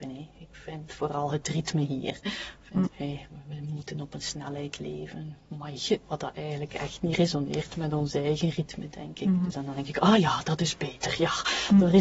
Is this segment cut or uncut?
cut